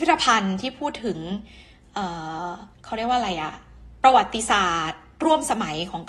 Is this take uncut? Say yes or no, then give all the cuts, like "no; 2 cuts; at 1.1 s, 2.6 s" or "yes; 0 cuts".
no; 1 cut; at 2.7 s